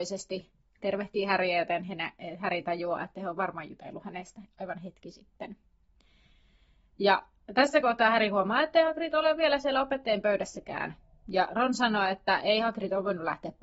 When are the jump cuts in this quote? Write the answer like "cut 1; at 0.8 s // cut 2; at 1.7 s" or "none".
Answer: none